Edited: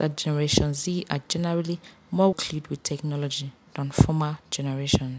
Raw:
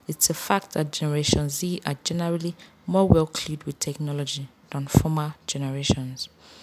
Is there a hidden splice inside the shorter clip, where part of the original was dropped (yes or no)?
yes